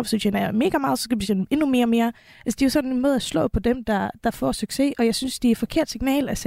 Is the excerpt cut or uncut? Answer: uncut